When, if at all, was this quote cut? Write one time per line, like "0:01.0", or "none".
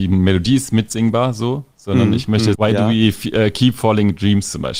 0:02.5